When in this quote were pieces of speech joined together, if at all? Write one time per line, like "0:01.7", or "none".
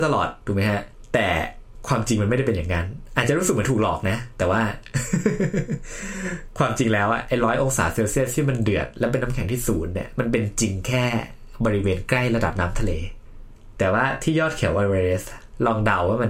none